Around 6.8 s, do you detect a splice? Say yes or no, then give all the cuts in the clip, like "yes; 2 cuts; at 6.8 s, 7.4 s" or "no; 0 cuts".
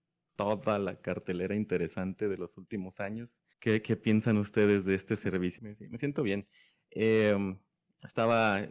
no; 2 cuts; at 3.5 s, 5.6 s